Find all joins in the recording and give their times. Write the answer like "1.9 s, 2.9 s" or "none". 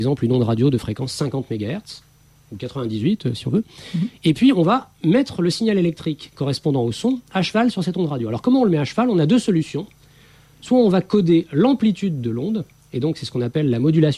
none

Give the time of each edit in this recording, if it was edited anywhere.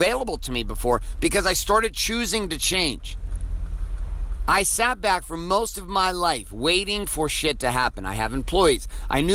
none

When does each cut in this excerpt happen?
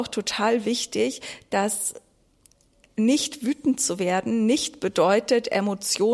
none

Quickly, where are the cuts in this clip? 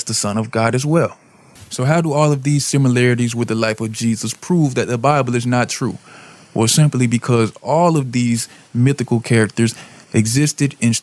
none

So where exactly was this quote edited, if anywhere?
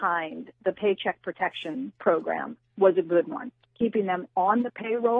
3.6 s

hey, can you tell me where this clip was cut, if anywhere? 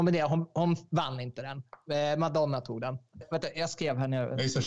3.2 s

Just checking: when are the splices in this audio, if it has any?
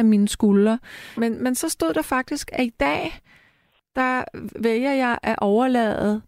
1.2 s

